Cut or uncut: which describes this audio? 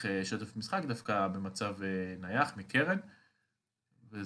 uncut